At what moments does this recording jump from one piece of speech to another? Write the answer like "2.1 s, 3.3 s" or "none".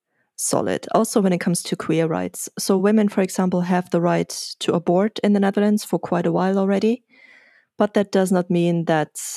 none